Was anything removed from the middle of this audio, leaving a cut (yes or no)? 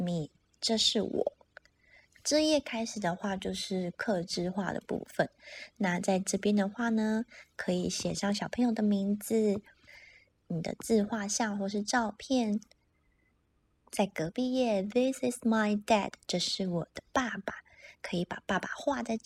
no